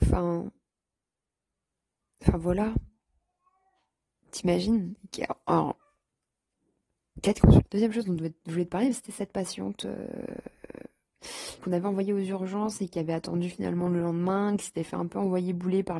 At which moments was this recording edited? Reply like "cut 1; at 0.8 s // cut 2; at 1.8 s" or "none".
cut 1; at 7.7 s // cut 2; at 11.6 s